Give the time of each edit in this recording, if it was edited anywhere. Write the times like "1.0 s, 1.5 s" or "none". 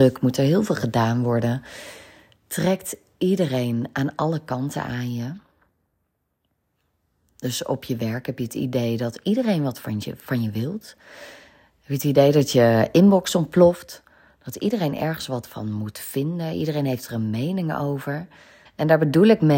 18.7 s